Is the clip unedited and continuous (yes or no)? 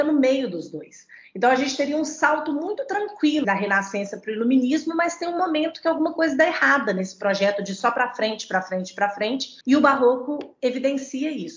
no